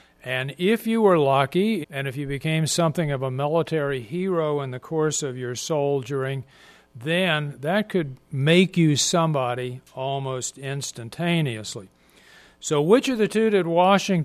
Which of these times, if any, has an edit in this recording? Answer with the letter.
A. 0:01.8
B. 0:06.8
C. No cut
A